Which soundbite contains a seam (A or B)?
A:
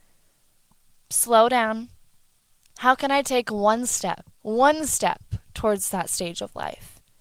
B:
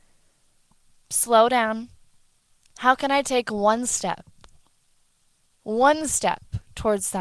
A